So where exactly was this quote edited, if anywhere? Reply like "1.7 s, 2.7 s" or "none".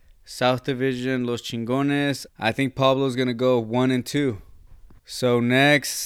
2.3 s, 5.0 s